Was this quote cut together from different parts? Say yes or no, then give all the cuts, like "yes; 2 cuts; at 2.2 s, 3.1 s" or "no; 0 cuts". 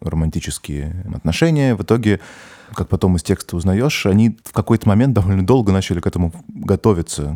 no; 0 cuts